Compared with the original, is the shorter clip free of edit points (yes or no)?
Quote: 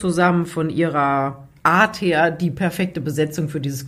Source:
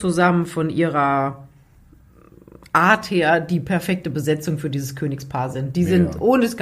no